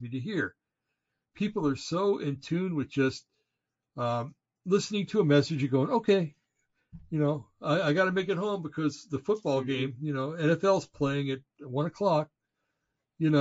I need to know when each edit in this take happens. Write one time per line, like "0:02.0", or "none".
none

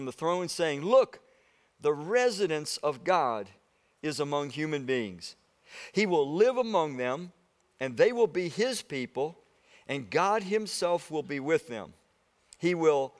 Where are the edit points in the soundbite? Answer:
none

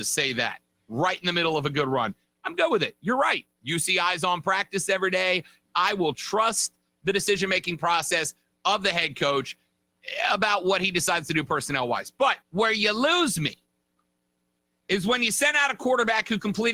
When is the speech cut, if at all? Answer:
0:05.6
0:12.4

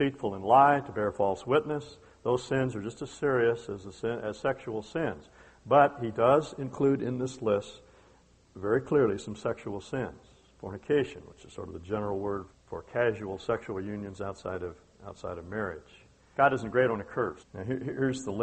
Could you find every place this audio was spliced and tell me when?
0:12.5
0:16.3
0:17.4

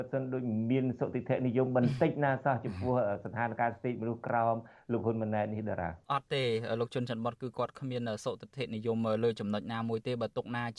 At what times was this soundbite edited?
0:06.0

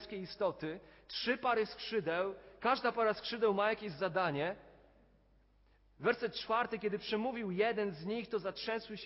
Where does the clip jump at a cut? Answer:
none

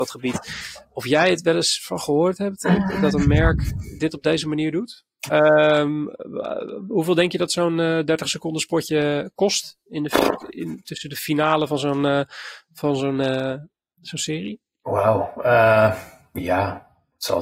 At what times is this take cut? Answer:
0:05.3

